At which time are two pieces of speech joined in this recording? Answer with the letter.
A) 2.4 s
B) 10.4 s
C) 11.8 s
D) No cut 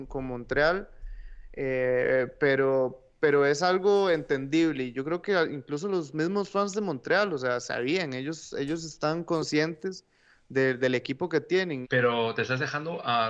C